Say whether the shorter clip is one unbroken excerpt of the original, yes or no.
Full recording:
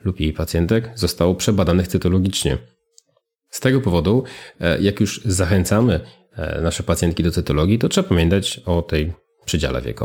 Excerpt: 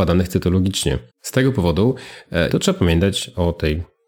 no